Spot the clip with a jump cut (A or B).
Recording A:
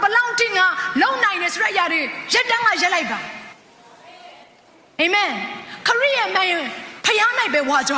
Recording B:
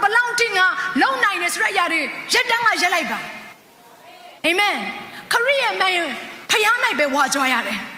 B